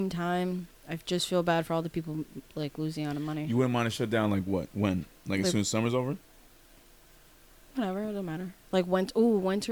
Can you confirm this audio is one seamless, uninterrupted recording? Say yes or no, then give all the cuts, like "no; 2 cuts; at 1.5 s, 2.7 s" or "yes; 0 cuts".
yes; 0 cuts